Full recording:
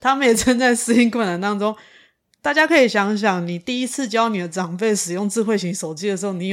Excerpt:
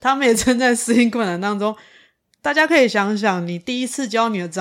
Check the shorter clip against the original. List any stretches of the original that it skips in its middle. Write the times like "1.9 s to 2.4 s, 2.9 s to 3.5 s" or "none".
none